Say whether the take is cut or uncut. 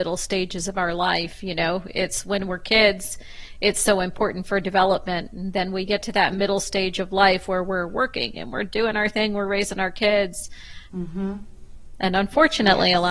cut